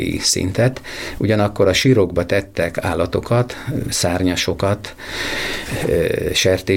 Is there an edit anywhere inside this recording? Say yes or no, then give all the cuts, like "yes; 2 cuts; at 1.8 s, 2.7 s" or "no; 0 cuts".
no; 0 cuts